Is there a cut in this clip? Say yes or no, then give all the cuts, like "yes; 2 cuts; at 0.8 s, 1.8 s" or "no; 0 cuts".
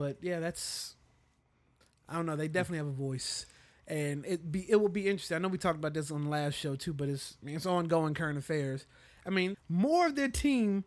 yes; 1 cut; at 9.5 s